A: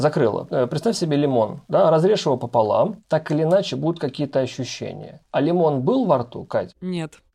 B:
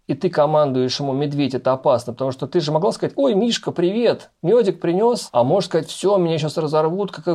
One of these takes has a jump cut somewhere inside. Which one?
A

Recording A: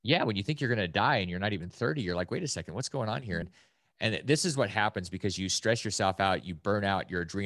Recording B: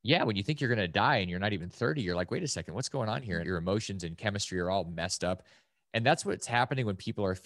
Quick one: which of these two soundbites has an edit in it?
B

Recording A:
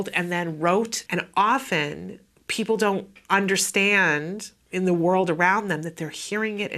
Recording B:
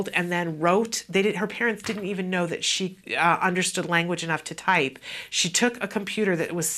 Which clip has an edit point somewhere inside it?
A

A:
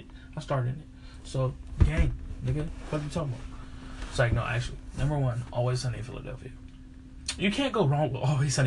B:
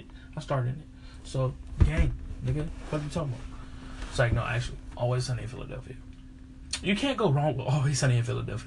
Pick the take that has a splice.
B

